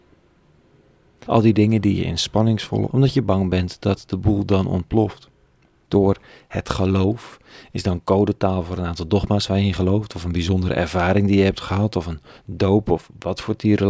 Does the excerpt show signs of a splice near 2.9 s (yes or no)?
yes